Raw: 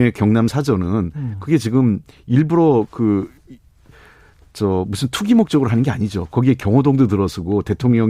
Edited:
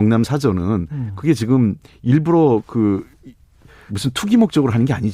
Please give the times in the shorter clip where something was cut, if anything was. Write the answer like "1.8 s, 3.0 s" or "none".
3.9 s